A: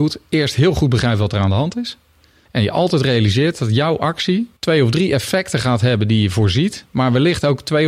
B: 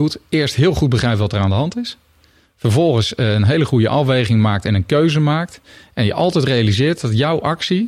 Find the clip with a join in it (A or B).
A